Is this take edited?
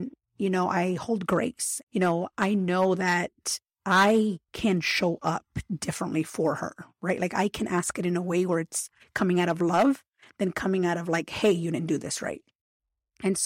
yes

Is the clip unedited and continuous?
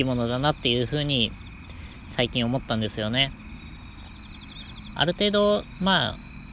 no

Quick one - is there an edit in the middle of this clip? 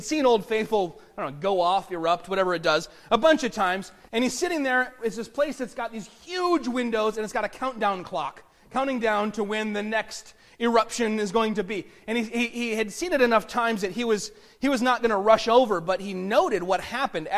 yes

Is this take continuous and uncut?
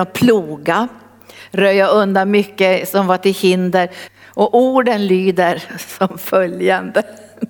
no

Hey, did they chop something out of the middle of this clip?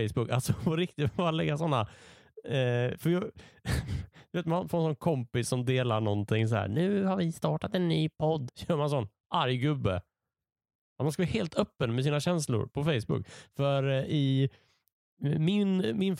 yes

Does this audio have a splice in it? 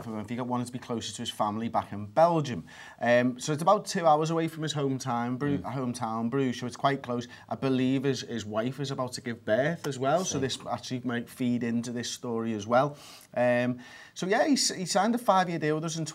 no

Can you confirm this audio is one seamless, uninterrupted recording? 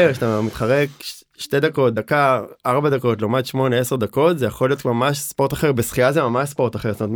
yes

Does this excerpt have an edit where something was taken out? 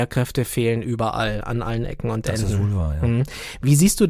no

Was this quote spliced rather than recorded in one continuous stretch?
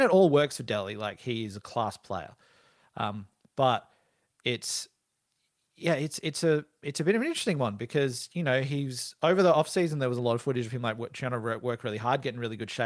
no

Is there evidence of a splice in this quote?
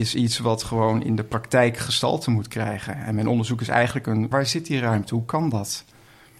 yes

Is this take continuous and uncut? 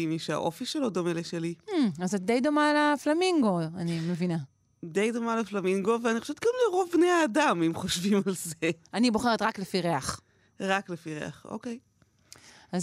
yes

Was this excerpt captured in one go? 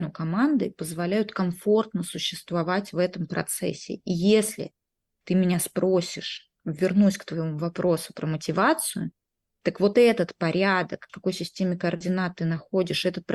no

